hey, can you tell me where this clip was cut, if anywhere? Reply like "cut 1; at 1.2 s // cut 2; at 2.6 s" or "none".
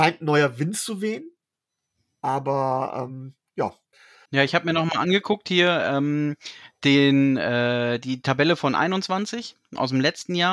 none